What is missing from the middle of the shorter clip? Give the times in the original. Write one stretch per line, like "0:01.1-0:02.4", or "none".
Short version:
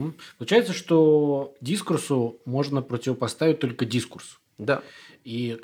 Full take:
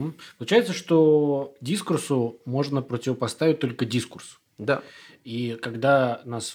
none